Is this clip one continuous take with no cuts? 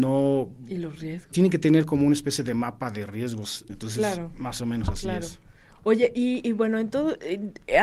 no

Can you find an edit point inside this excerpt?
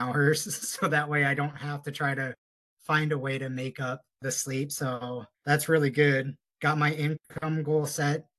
no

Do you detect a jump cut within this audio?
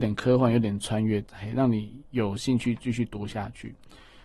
yes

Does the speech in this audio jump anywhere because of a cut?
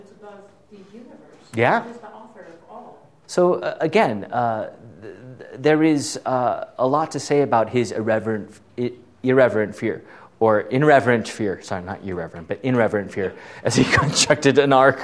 yes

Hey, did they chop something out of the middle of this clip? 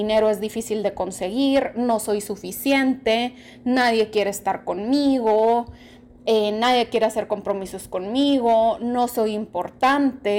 no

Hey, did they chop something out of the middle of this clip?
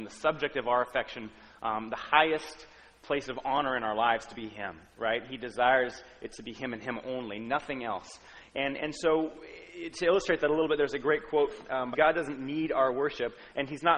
yes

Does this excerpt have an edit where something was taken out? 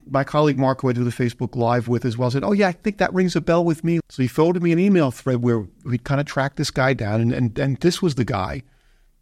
yes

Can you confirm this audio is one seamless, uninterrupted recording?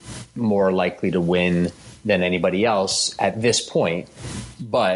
yes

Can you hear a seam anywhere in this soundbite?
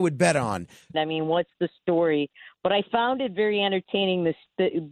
yes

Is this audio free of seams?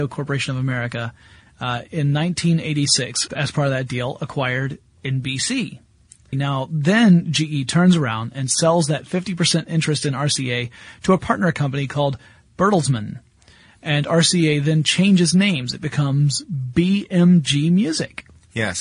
no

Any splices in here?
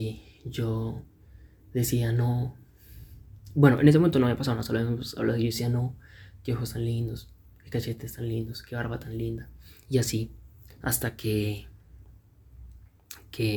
no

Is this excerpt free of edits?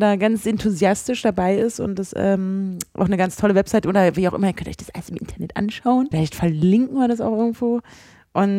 no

